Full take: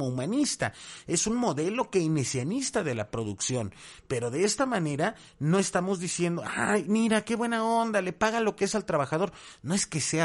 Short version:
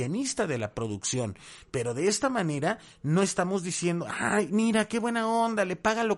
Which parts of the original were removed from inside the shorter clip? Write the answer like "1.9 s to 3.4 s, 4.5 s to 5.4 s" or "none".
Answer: none